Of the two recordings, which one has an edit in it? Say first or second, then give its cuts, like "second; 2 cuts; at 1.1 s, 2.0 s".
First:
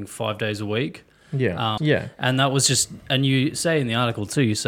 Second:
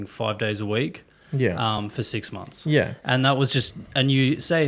first; 1 cut; at 1.8 s